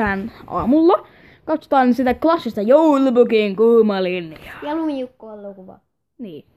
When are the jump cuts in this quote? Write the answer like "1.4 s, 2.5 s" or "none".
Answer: none